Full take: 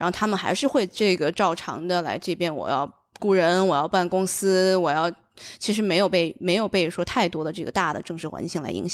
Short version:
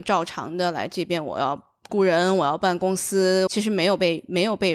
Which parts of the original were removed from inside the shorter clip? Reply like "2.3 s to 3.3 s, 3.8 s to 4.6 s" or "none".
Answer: 4.8 s to 5.6 s